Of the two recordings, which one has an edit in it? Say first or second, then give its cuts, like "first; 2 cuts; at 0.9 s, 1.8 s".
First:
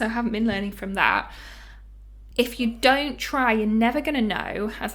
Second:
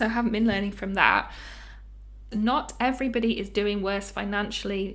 second; 1 cut; at 2.3 s